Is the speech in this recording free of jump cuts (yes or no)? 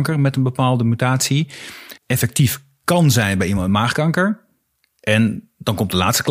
no